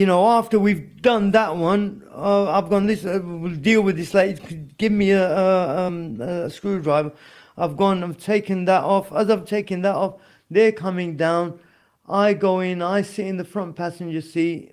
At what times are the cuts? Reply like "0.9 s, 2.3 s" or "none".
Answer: none